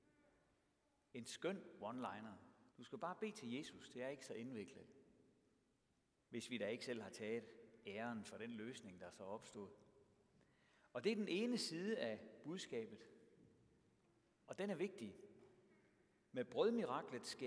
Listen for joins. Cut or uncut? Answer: cut